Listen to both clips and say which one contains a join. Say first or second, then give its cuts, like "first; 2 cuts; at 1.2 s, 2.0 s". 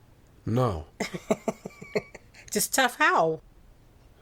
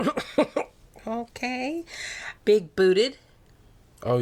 second; 1 cut; at 2.4 s